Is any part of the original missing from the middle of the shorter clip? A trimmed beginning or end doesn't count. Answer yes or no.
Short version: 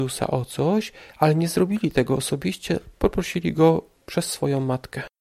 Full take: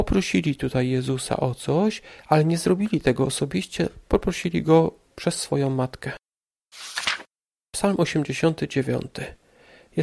no